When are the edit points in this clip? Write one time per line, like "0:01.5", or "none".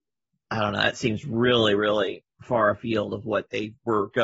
0:02.3